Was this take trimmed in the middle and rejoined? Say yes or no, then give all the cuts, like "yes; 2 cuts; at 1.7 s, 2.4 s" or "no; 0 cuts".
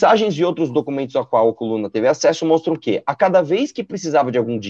no; 0 cuts